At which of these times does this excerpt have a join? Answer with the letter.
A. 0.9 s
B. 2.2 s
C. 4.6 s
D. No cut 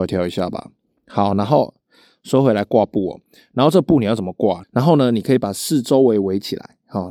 C